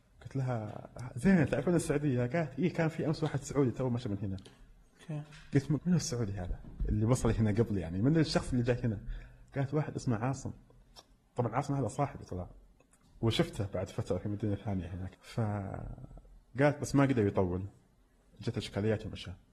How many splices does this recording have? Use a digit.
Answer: 2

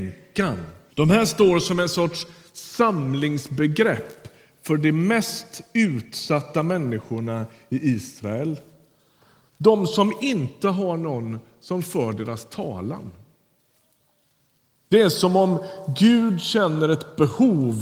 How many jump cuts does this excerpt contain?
1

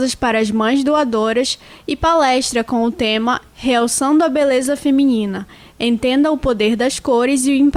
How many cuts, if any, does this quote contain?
0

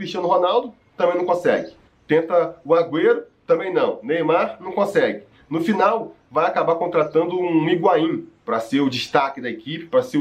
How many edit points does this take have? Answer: 1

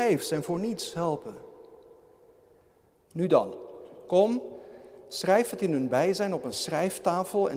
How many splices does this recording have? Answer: 1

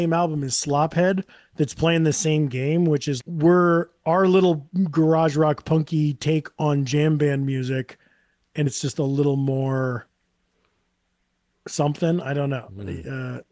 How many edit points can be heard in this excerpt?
2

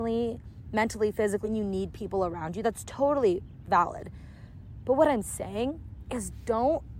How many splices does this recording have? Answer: 1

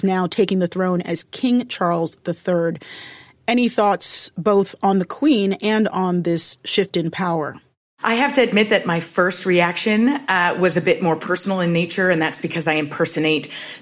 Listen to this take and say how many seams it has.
0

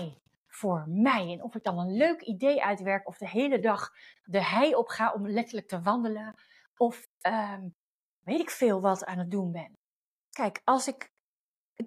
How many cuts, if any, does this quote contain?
0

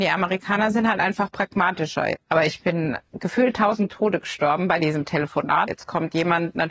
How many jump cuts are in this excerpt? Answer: 2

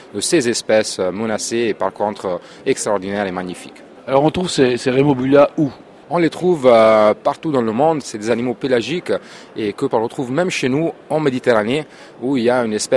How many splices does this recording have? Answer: 2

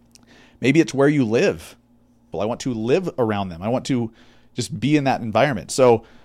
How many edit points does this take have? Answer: 1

